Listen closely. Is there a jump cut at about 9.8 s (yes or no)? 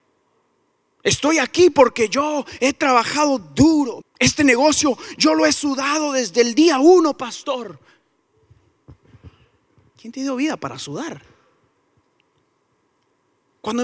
no